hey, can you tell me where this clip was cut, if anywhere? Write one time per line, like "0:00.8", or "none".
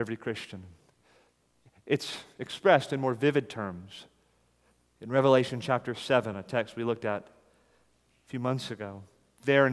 none